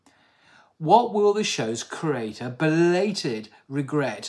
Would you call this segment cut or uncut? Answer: uncut